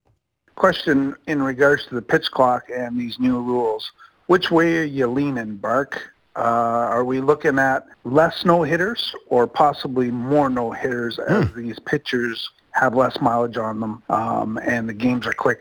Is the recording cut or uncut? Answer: cut